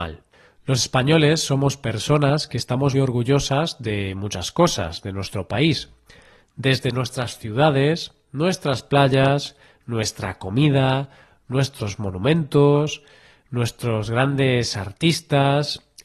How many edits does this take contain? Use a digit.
1